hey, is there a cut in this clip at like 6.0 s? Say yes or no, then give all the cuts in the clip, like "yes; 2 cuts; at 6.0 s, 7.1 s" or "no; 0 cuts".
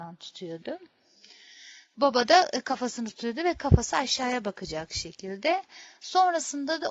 no; 0 cuts